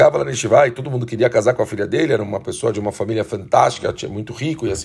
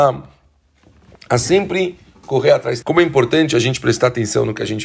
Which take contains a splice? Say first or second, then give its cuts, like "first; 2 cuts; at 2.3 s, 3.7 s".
second; 1 cut; at 2.8 s